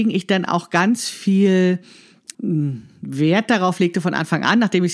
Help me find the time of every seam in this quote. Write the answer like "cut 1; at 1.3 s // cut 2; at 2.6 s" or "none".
cut 1; at 2.3 s